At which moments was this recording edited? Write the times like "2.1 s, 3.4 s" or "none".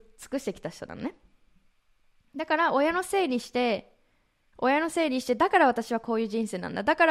4.5 s